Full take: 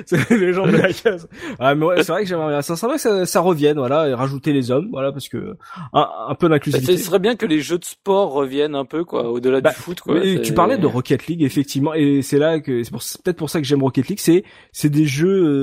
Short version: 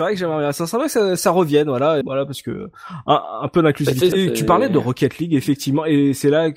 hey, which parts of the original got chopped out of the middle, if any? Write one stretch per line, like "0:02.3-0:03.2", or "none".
0:04.1-0:04.9
0:07.0-0:10.2